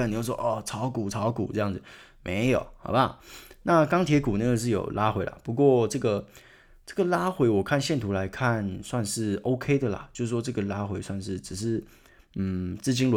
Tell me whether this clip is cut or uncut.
uncut